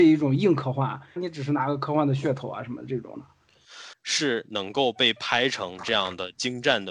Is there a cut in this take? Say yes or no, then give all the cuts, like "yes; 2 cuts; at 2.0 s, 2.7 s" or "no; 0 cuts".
yes; 2 cuts; at 1.2 s, 3.9 s